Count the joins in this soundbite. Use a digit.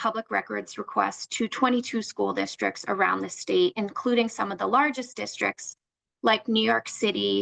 0